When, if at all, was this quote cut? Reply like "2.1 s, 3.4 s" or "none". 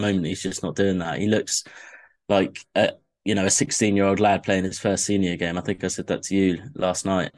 none